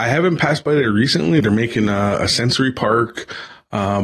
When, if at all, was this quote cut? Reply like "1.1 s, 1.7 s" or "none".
1.4 s